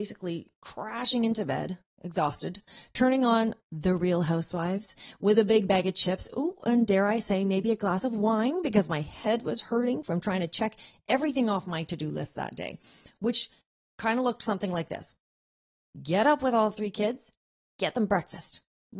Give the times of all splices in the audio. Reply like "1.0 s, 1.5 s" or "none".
none